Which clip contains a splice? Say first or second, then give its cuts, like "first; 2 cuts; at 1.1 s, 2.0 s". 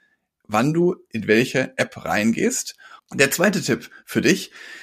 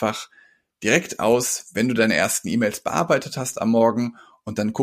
first; 1 cut; at 3.0 s